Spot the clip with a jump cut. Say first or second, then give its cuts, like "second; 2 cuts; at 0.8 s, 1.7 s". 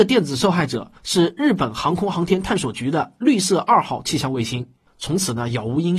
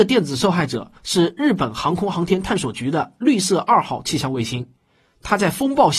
first; 1 cut; at 4.9 s